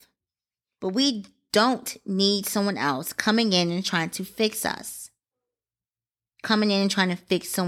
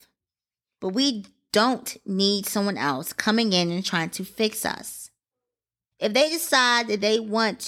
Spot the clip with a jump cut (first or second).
second